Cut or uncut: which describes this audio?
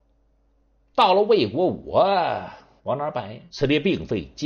cut